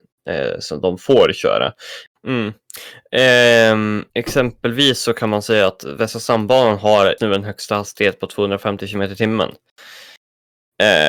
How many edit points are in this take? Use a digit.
3